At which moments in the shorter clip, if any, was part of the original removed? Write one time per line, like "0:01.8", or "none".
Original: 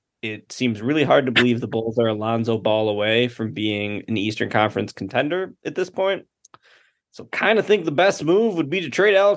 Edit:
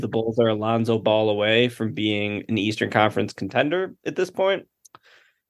none